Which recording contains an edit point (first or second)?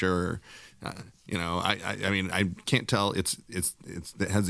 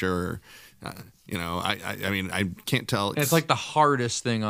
second